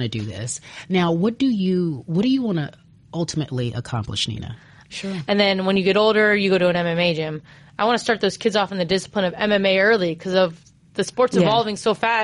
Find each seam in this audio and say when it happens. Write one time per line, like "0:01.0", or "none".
0:04.9